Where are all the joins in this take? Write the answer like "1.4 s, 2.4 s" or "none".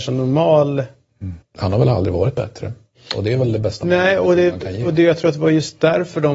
1.4 s